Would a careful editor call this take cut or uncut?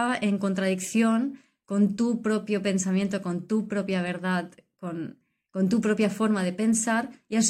uncut